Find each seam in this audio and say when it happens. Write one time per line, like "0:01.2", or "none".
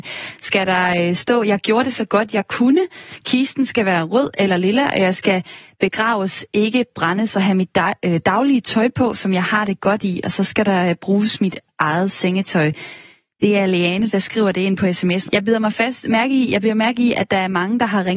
none